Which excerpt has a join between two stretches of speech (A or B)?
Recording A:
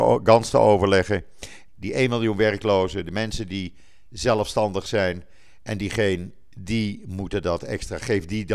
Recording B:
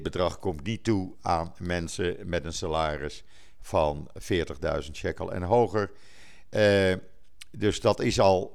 A